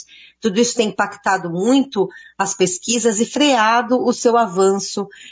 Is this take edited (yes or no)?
no